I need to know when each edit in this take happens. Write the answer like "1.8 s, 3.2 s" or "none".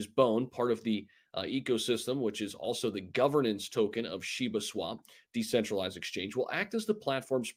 none